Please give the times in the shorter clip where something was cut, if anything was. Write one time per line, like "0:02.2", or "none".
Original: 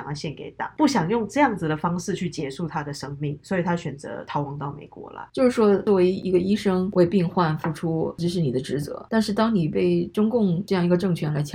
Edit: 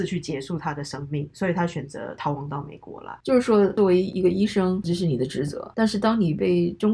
0:04.8